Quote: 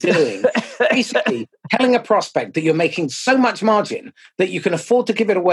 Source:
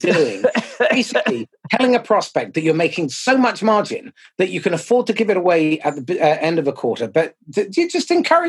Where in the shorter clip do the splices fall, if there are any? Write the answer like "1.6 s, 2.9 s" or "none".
none